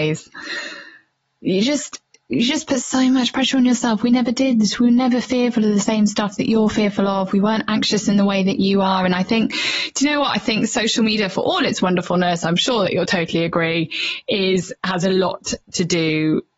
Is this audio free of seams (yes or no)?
yes